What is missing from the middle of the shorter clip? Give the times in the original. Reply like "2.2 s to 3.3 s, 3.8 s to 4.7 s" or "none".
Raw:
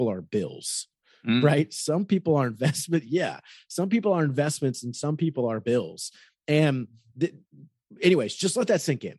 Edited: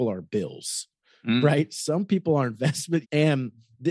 3.0 s to 6.4 s

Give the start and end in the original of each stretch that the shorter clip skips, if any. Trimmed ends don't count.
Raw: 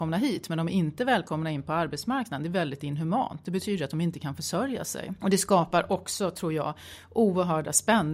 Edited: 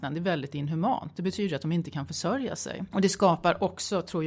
none

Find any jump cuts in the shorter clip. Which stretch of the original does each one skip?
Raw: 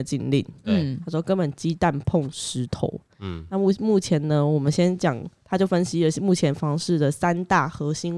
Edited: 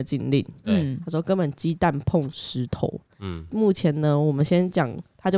3.5 s to 3.8 s

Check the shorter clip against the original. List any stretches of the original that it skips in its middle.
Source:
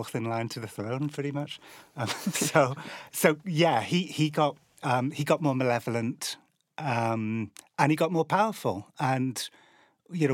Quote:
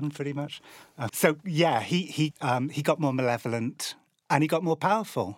2.1 s to 3.1 s, 4.3 s to 4.7 s, 6.6 s to 7.7 s

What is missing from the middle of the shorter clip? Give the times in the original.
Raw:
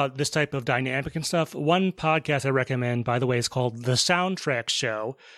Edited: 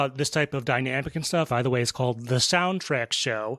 1.5 s to 3.0 s

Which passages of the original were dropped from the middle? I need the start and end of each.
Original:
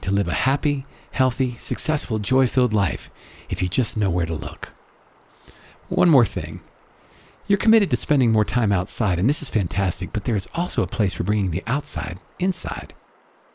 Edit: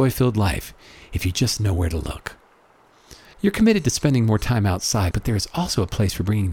5.7 s to 7.4 s, 9.2 s to 10.1 s

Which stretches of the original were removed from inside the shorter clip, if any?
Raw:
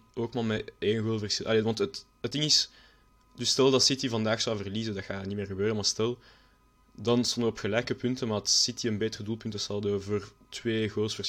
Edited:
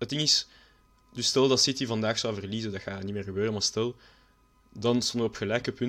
none

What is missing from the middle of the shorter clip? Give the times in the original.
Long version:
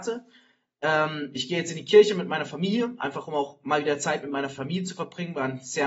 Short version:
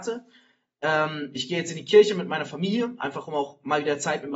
none

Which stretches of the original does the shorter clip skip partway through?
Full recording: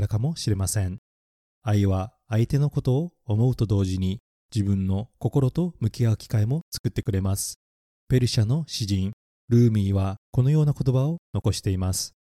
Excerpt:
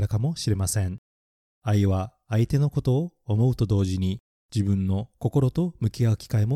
none

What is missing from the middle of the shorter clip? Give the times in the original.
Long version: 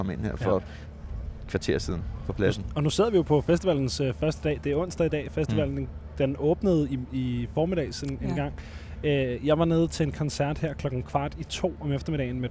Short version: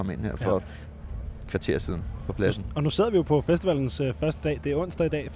none

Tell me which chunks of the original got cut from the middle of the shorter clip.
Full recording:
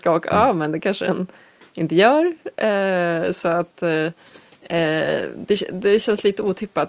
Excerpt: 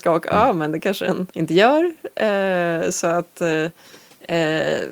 1.3 s to 1.7 s

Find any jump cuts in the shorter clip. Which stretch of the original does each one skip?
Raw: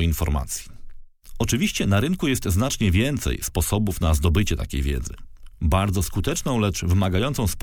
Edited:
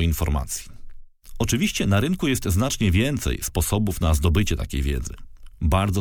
none

